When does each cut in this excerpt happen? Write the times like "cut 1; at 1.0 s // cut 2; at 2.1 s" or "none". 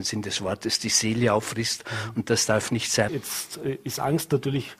cut 1; at 3.1 s